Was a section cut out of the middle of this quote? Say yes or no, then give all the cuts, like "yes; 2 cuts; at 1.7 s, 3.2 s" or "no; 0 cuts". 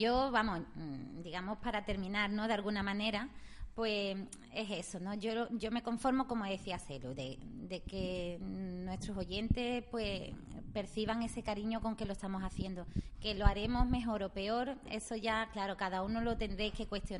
no; 0 cuts